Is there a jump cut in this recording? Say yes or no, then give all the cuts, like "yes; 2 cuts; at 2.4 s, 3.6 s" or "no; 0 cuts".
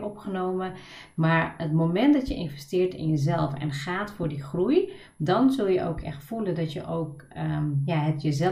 no; 0 cuts